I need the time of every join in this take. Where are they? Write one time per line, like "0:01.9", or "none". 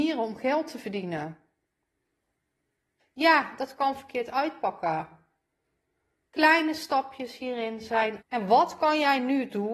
0:03.0
0:08.2